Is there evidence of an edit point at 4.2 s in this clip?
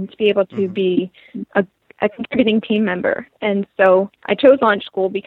yes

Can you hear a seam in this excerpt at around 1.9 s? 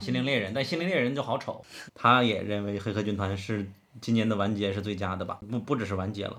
yes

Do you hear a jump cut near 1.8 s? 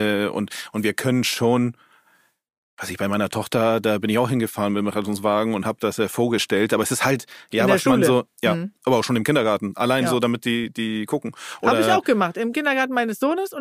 no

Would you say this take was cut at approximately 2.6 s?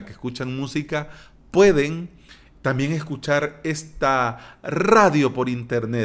no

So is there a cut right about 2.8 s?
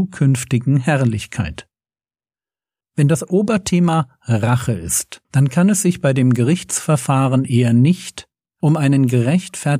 yes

